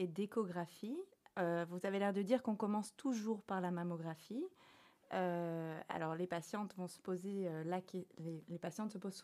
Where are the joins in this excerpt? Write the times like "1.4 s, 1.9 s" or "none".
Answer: none